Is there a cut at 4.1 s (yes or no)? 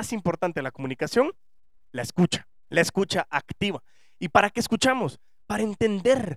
no